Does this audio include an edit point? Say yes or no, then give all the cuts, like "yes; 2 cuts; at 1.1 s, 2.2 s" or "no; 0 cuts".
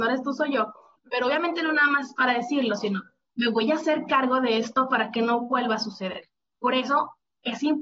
yes; 2 cuts; at 1.0 s, 6.6 s